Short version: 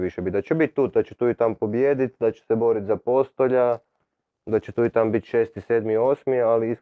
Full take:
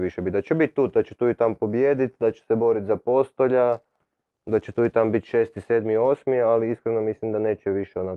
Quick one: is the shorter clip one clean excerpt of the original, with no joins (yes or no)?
yes